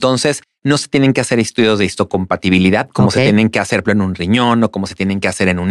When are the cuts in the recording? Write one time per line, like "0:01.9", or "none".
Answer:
0:03.8